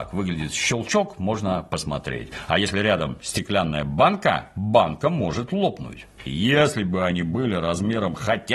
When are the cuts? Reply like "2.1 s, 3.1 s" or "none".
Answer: 6.3 s